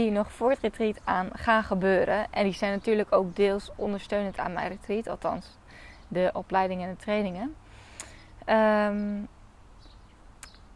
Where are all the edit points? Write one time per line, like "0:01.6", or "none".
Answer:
none